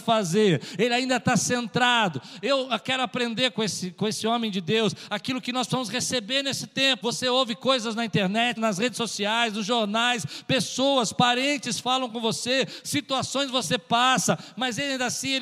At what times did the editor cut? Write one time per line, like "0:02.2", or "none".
0:07.0
0:08.6

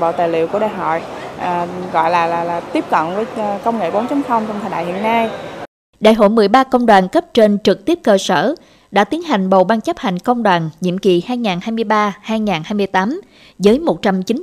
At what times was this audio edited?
0:01.9

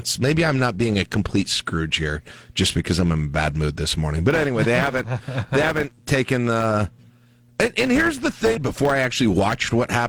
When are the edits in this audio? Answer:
0:08.6

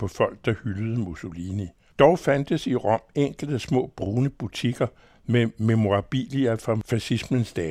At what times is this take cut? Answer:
0:01.9

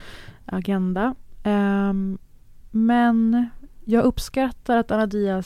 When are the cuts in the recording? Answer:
none

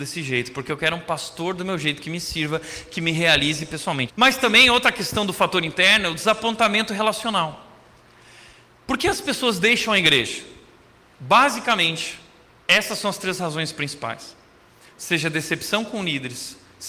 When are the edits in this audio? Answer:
0:04.1
0:14.9

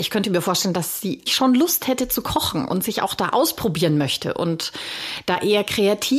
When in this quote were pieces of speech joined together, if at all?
0:01.3

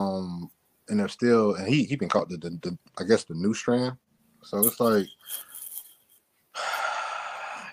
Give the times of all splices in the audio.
none

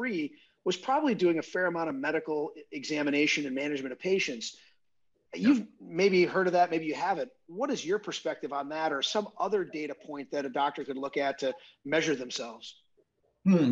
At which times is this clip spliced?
none

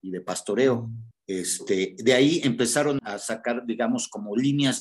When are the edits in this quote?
0:01.1
0:03.0

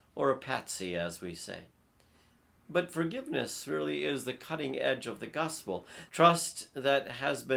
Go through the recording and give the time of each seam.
0:06.1

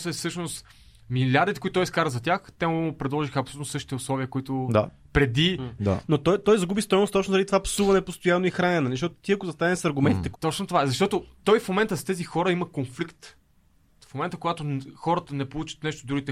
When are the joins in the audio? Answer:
0:05.8
0:10.3
0:14.0

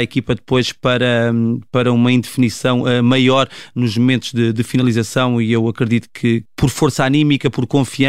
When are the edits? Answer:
0:06.5

